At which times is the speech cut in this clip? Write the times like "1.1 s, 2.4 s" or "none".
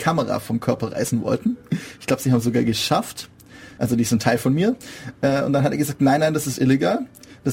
3.8 s

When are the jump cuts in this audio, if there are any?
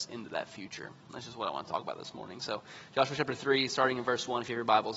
none

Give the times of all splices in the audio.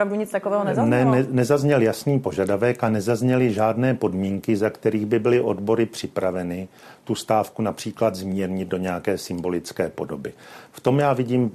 none

